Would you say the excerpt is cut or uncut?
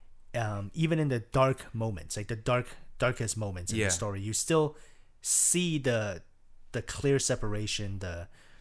uncut